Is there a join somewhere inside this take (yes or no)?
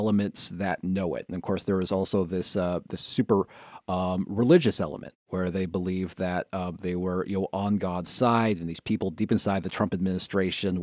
no